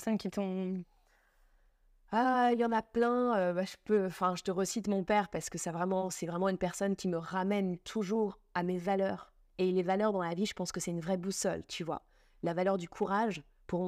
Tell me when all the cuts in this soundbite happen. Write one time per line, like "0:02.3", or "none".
none